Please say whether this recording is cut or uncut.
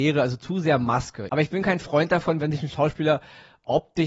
cut